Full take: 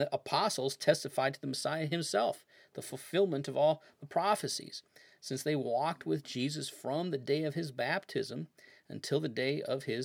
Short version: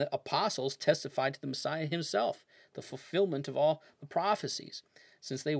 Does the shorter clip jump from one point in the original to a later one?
no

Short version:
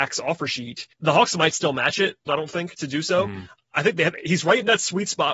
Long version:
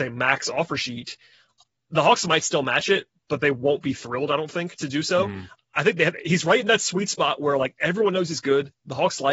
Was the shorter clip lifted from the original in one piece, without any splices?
no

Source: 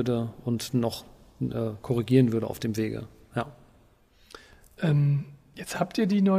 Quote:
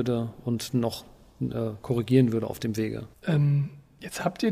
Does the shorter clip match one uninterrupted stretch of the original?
no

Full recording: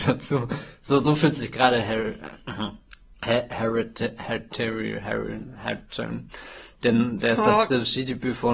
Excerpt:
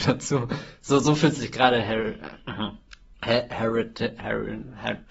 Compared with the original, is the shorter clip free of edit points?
no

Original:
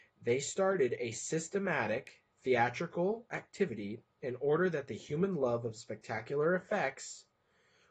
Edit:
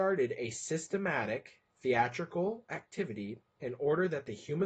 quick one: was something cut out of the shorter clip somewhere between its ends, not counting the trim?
no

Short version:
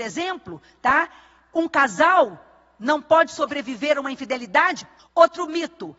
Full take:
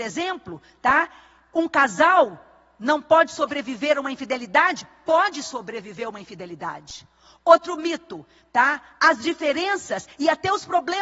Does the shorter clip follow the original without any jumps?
no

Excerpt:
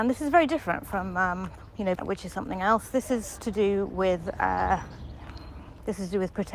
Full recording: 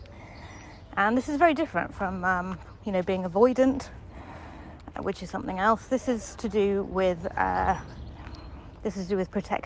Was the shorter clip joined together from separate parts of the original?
yes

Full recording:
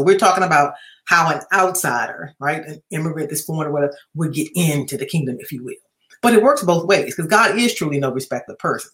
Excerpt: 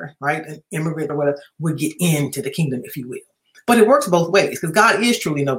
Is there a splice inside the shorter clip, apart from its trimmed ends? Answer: yes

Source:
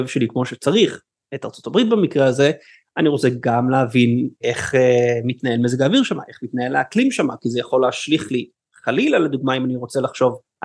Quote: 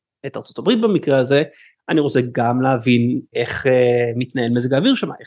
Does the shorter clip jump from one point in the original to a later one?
no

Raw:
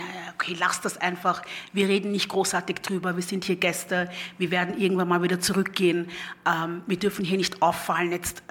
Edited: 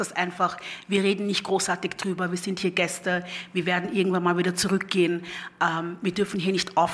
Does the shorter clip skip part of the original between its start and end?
no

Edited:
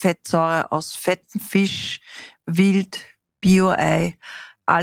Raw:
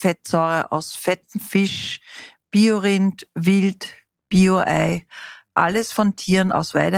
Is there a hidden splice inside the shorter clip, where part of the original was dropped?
yes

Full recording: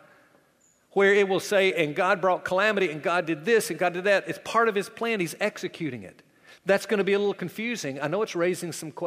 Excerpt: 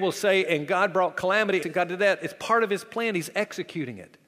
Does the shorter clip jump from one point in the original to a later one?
yes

